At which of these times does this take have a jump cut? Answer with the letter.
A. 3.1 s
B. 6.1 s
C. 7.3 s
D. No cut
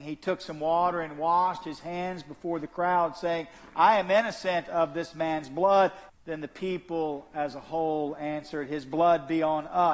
B